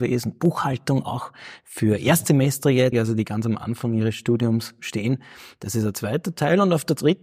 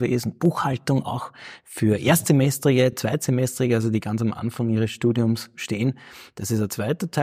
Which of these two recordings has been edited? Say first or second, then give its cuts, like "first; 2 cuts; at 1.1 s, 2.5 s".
first; 1 cut; at 2.9 s